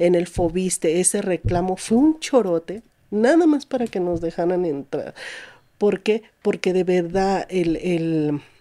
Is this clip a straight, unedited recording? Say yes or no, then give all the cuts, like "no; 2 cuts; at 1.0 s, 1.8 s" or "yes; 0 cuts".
yes; 0 cuts